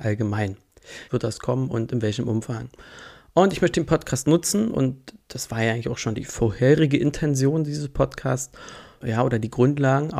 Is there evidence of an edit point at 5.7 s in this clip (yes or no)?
no